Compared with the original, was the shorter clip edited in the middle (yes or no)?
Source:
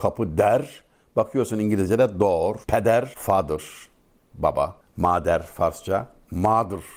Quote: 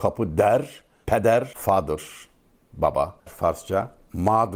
yes